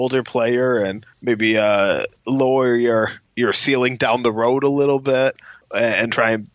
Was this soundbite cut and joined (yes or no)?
no